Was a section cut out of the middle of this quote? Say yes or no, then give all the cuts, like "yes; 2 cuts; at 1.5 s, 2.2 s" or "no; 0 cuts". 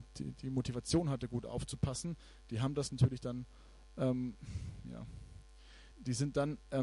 yes; 1 cut; at 5.9 s